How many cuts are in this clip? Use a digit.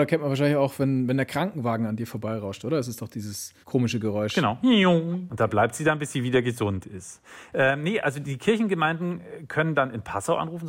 2